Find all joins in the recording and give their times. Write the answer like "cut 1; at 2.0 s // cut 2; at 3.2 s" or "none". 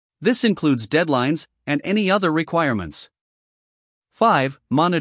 cut 1; at 1.5 s // cut 2; at 3.9 s